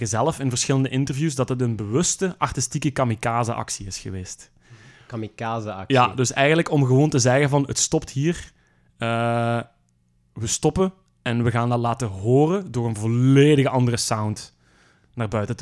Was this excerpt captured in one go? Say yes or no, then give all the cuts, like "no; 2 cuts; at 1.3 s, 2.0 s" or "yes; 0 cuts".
yes; 0 cuts